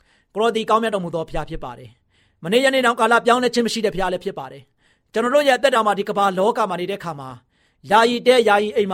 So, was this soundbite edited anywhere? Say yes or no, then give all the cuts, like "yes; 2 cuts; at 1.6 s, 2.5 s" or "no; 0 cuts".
no; 0 cuts